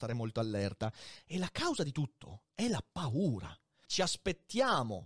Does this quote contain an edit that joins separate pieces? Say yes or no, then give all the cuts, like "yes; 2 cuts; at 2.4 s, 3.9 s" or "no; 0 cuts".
yes; 1 cut; at 3.9 s